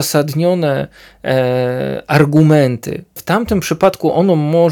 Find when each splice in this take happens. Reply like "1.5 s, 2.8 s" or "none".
3.2 s